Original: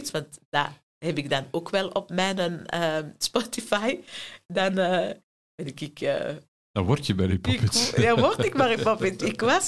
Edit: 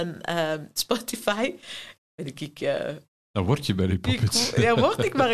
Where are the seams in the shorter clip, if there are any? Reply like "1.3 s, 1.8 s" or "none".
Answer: 2.0 s